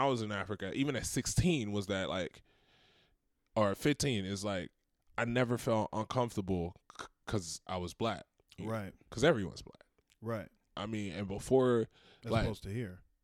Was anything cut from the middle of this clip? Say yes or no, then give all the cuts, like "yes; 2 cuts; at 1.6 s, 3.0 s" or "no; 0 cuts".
no; 0 cuts